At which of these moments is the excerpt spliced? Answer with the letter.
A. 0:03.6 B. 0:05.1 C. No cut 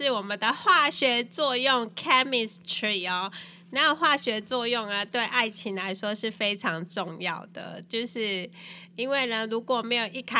C